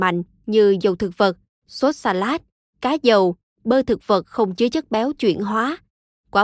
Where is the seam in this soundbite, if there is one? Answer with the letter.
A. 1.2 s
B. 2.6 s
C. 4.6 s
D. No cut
D